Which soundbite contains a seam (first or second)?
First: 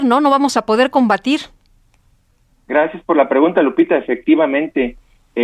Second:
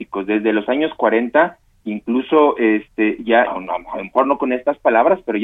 second